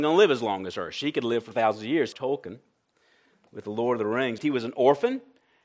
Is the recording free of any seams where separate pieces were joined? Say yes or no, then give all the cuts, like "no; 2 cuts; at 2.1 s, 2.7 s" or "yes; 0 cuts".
no; 2 cuts; at 2.1 s, 4.4 s